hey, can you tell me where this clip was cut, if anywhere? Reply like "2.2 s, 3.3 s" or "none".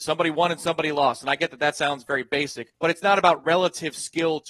2.7 s